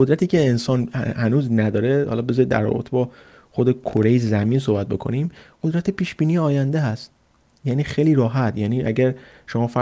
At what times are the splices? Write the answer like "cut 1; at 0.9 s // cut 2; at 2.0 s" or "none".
none